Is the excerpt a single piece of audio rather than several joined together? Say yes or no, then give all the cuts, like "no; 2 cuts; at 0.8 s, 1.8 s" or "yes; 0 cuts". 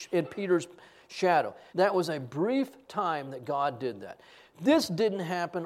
no; 1 cut; at 1.7 s